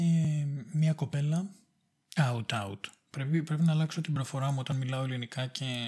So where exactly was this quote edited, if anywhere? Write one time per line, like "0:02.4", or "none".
0:02.2